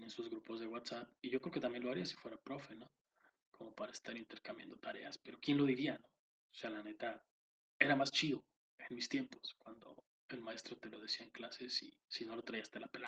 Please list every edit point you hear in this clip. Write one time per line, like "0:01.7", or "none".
0:12.0